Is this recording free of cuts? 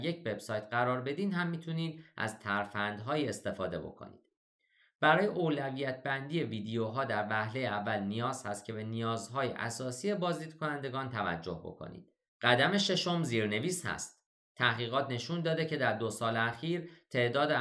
no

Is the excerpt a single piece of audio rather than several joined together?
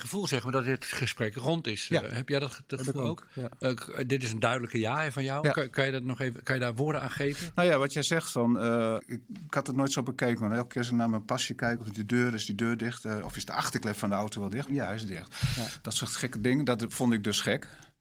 no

